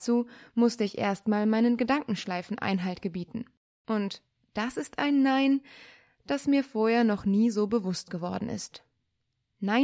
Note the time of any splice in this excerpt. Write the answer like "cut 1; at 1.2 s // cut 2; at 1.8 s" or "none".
none